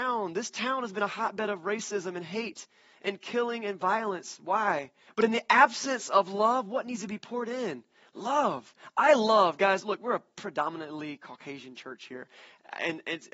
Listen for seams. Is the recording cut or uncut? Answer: cut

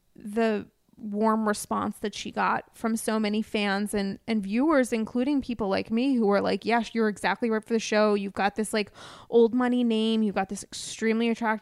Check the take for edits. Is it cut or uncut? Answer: uncut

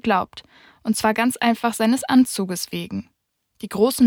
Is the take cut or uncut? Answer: uncut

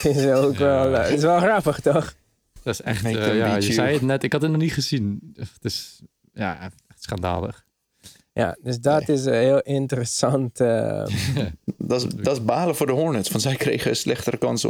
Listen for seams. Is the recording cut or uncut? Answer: uncut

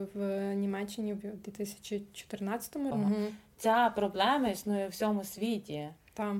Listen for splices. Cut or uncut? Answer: cut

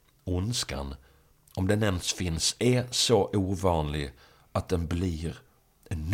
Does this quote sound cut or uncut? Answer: uncut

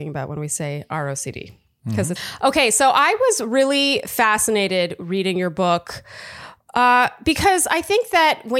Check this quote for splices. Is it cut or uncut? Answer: cut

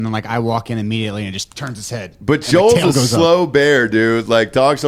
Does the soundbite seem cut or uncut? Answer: uncut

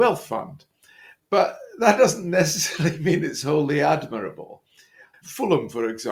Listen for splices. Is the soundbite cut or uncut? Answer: cut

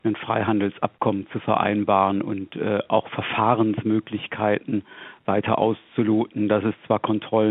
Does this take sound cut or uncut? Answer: uncut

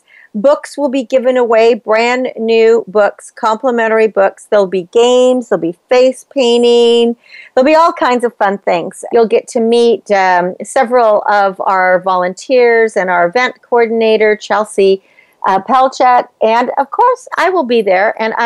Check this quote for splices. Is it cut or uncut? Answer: cut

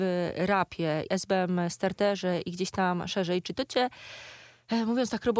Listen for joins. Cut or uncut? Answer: cut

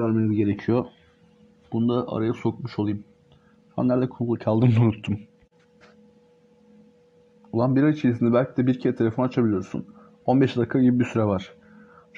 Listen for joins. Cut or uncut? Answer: uncut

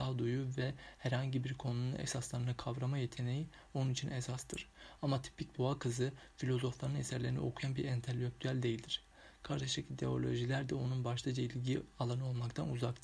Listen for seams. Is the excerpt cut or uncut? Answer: cut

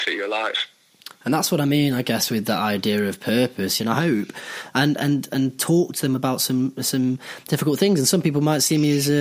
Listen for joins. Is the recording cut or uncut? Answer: cut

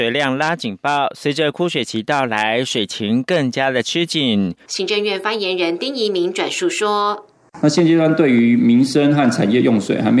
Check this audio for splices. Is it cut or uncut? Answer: cut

